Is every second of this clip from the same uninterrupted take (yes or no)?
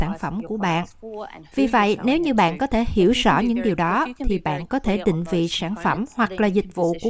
yes